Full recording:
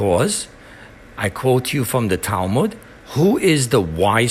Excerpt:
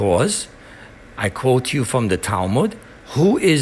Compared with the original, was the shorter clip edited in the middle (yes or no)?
no